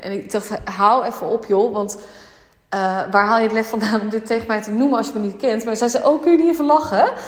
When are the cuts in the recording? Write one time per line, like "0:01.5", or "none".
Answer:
none